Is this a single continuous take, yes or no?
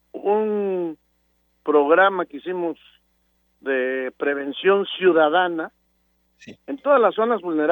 yes